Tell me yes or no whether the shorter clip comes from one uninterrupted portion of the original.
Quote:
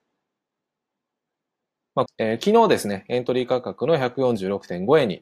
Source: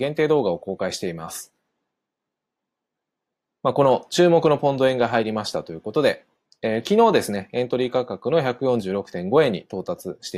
no